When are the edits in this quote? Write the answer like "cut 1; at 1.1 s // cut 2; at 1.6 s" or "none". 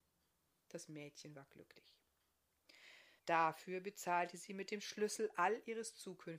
cut 1; at 3.2 s

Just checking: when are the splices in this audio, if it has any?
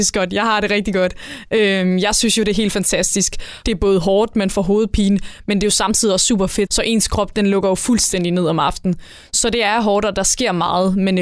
cut 1; at 3.6 s // cut 2; at 6.7 s

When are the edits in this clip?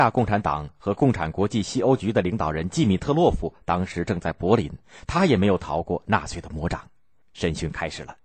cut 1; at 7.2 s

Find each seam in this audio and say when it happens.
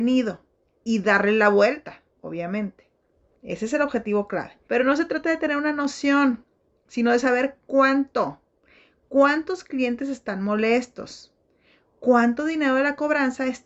cut 1; at 3.4 s // cut 2; at 4.7 s // cut 3; at 9.0 s

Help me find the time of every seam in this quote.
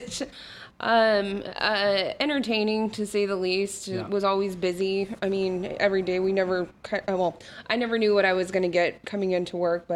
none

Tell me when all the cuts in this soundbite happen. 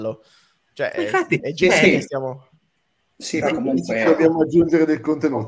cut 1; at 3.4 s

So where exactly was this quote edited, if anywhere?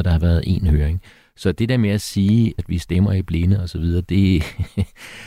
cut 1; at 2.6 s

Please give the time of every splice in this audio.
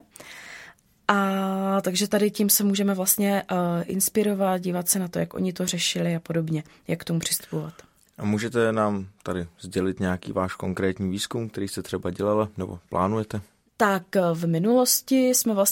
none

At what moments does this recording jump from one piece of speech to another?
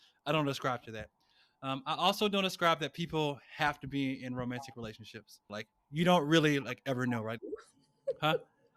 cut 1; at 5.5 s // cut 2; at 7.4 s

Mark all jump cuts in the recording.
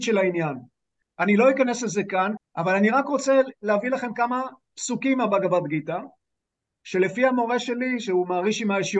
cut 1; at 1.0 s // cut 2; at 2.4 s

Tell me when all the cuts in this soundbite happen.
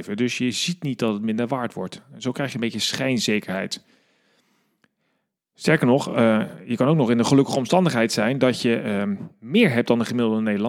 none

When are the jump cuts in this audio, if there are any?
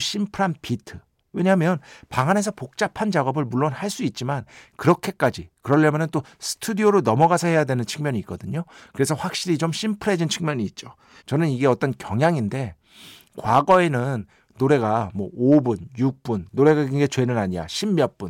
cut 1; at 11.2 s

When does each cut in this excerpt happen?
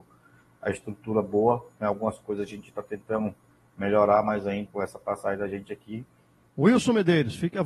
cut 1; at 4.7 s // cut 2; at 6.5 s

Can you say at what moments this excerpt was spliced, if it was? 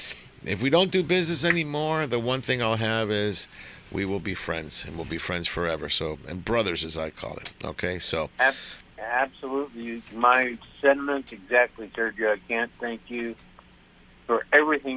none

